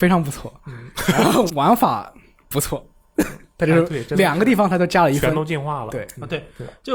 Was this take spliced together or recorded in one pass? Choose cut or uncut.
cut